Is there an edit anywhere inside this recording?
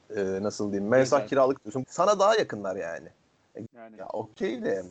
yes; 2 cuts; at 1.8 s, 3.7 s

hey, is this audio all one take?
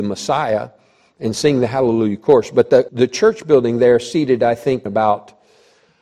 no; 2 cuts; at 2.9 s, 4.9 s

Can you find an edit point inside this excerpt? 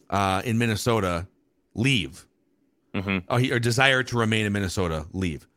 no; 0 cuts

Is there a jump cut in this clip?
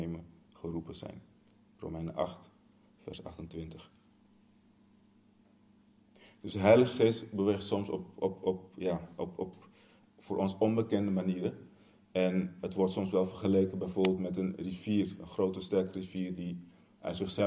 no; 0 cuts

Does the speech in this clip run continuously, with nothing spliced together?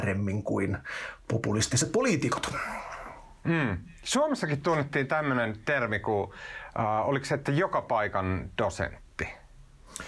yes; 0 cuts

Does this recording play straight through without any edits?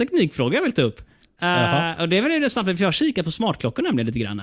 yes; 0 cuts

